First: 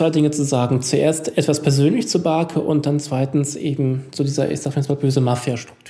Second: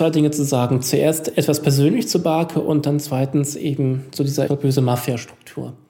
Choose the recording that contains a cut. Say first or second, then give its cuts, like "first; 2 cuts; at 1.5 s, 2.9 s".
second; 1 cut; at 4.5 s